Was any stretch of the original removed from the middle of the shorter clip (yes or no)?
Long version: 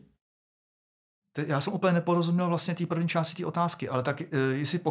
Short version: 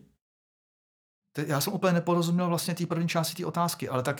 no